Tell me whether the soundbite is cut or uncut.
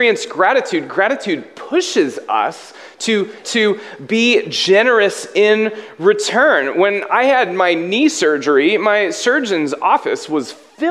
cut